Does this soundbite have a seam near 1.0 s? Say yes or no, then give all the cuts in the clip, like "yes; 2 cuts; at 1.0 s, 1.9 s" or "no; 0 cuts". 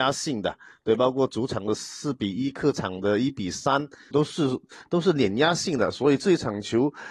no; 1 cut; at 4.1 s